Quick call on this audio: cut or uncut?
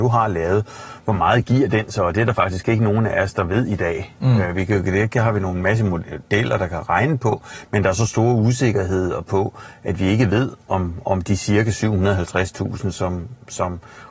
uncut